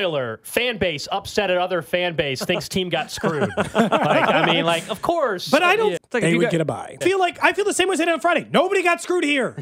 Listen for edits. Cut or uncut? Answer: cut